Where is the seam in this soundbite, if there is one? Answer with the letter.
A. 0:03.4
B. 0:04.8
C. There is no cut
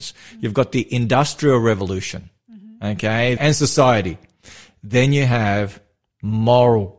A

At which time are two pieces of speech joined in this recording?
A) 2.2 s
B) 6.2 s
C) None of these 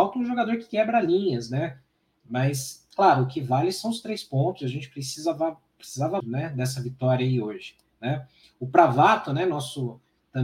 B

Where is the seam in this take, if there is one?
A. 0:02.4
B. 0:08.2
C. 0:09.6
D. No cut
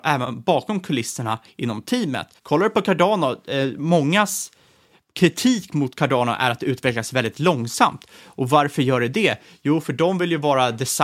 A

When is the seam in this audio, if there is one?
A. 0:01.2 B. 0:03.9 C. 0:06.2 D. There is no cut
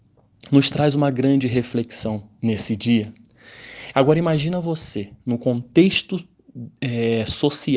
B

